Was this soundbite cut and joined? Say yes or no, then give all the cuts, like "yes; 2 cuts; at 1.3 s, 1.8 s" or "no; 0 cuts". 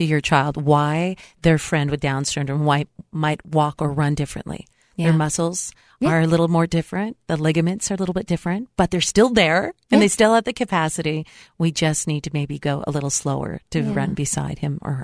no; 0 cuts